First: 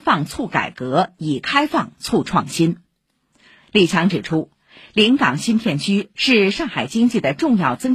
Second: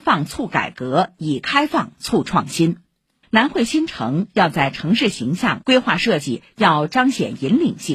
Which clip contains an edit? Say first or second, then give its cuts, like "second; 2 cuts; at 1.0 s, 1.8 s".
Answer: second; 2 cuts; at 3.2 s, 5.6 s